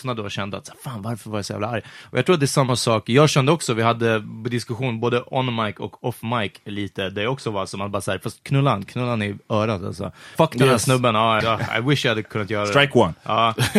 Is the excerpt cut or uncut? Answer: cut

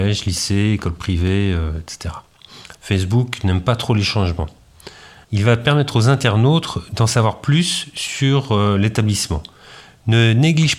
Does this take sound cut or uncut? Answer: cut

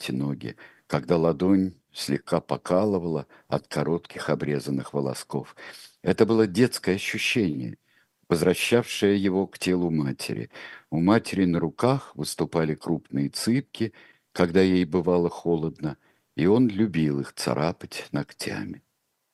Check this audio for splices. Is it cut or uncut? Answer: uncut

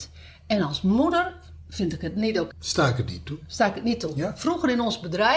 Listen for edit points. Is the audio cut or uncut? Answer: cut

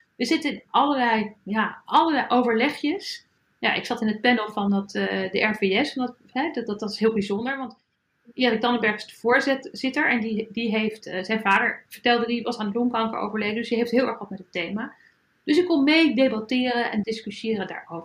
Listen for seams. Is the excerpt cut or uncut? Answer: uncut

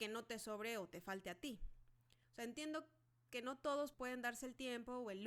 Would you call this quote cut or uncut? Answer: cut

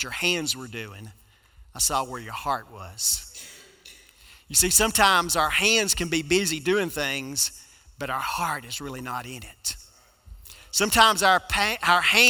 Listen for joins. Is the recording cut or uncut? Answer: uncut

